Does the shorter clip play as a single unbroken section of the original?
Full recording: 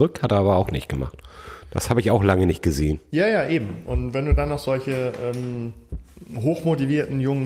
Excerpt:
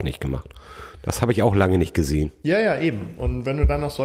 yes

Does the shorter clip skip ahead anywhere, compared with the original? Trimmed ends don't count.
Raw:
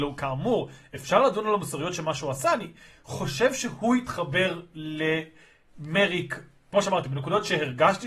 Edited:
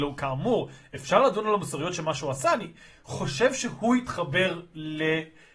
no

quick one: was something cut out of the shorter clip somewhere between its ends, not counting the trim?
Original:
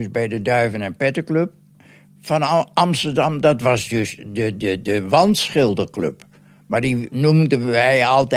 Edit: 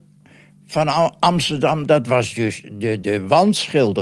yes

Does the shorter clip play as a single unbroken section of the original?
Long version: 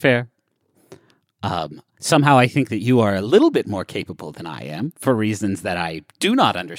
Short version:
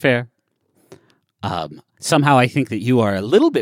yes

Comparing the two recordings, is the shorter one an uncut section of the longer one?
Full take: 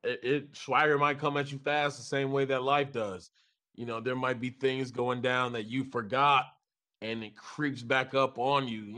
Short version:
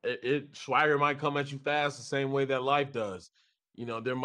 yes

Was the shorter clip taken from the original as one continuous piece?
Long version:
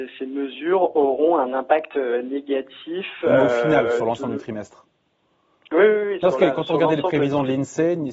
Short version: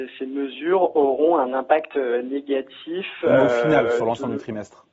yes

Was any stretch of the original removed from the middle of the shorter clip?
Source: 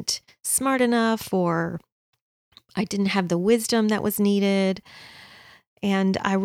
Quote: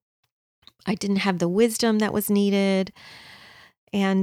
no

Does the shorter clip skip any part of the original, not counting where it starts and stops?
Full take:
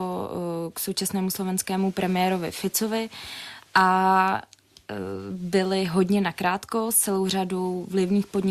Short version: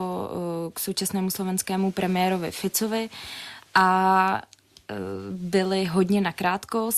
no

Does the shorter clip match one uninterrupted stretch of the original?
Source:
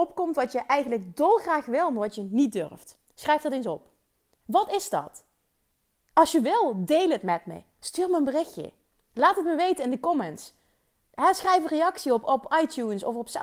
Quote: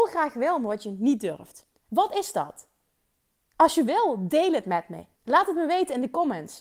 no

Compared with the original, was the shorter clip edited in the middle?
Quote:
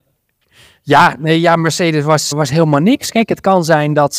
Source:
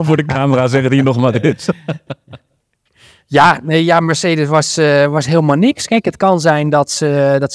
yes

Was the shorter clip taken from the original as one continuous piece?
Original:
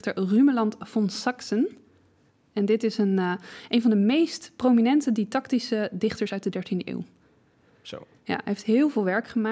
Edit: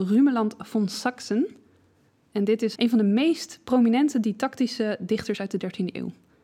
no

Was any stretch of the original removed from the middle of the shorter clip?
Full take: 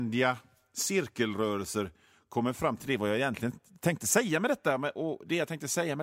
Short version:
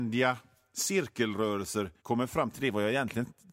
yes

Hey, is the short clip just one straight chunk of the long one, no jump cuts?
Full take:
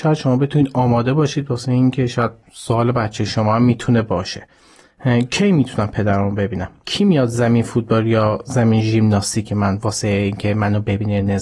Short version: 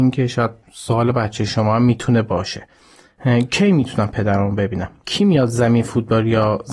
yes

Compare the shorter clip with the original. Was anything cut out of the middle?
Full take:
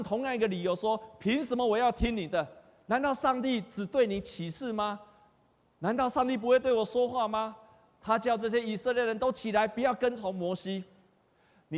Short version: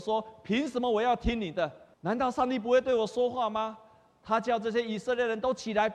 yes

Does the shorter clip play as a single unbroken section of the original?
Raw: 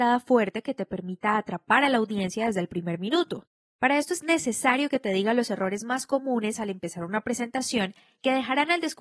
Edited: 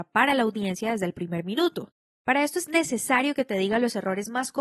yes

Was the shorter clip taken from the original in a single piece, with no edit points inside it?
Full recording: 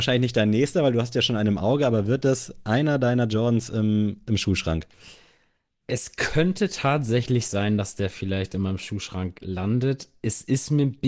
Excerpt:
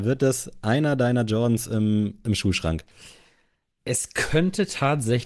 yes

